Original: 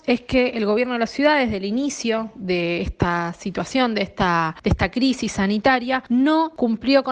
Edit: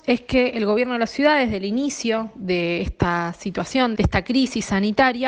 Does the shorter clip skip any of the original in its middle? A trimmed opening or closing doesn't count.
yes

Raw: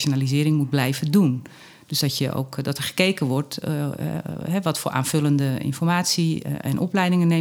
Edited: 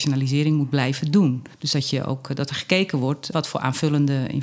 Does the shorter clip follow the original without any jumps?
no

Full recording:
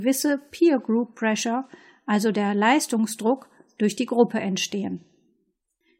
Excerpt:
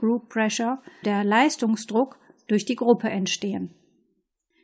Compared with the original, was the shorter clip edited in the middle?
yes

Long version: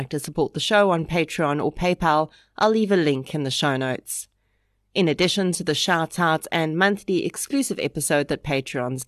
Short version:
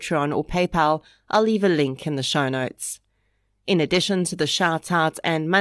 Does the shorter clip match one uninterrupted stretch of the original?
yes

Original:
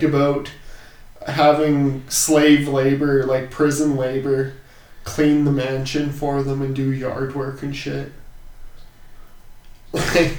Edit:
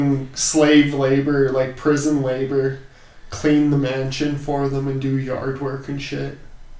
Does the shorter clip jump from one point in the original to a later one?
no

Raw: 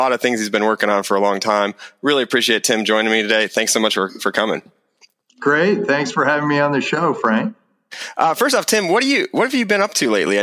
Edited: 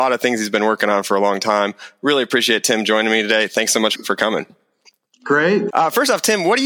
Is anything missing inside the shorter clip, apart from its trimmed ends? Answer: yes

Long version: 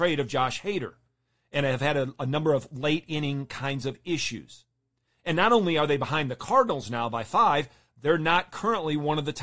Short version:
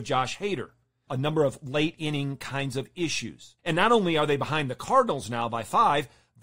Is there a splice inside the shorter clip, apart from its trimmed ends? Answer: yes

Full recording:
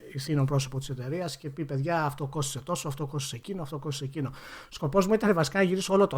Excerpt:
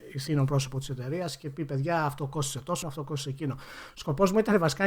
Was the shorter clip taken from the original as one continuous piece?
no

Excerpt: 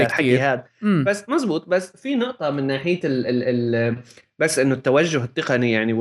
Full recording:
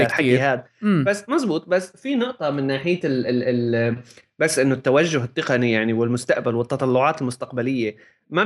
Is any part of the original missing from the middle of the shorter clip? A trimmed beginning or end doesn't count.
no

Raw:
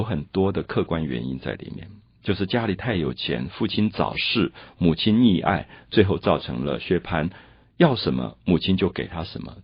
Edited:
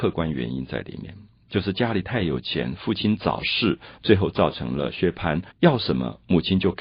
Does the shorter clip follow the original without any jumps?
no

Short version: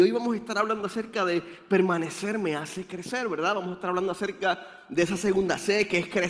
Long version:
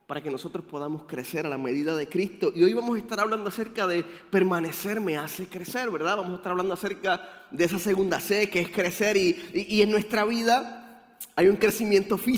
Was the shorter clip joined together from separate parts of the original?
no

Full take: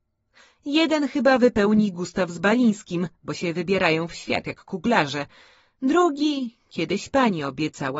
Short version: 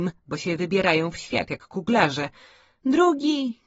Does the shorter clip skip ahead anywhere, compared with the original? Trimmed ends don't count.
no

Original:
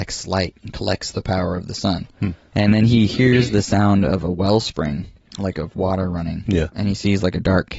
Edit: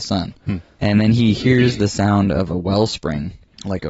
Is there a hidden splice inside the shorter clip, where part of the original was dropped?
no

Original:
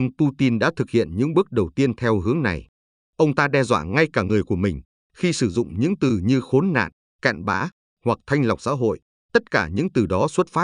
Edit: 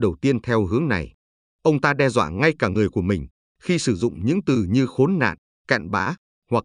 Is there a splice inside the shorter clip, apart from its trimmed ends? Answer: no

